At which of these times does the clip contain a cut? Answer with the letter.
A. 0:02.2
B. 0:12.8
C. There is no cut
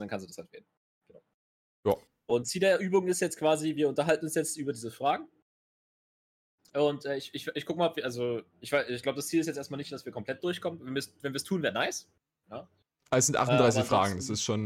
C